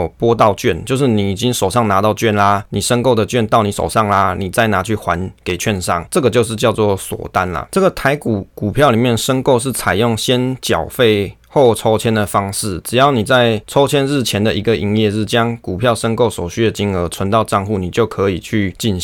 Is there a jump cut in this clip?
no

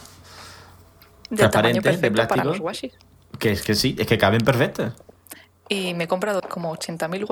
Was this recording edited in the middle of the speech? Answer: yes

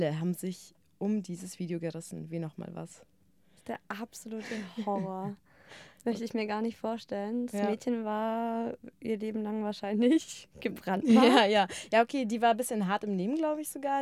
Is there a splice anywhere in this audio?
no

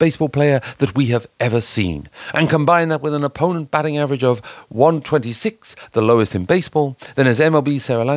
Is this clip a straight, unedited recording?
no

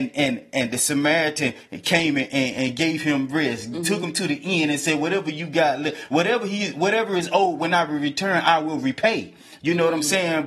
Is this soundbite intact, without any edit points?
yes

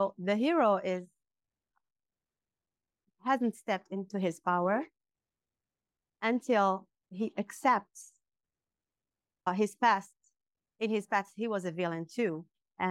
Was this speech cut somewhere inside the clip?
yes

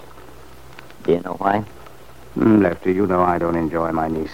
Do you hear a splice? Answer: no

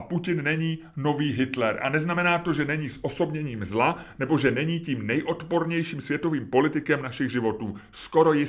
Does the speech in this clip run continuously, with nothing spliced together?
yes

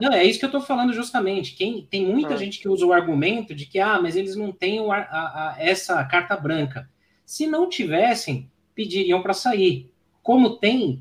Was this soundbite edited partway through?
no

